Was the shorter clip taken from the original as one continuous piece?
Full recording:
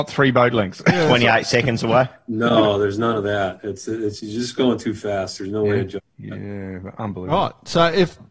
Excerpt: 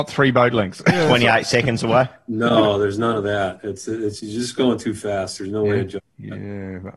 yes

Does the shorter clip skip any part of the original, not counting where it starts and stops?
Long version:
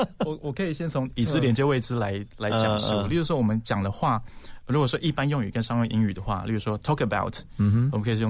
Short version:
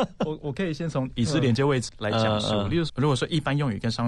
yes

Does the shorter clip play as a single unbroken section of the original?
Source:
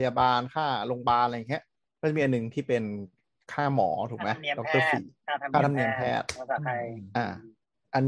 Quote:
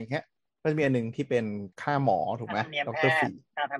no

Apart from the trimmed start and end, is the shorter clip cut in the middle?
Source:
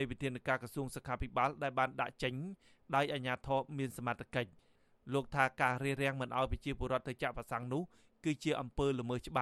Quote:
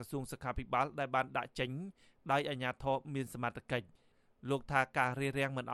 no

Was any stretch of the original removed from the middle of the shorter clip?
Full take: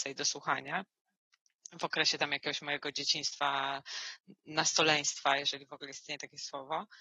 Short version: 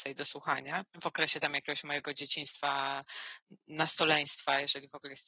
yes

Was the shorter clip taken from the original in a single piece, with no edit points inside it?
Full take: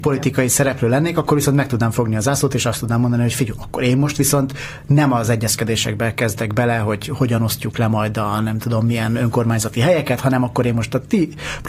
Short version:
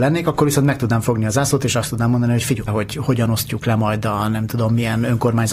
no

